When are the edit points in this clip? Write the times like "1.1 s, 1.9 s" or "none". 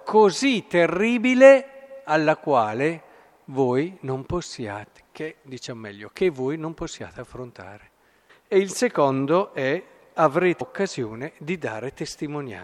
8.3 s, 10.6 s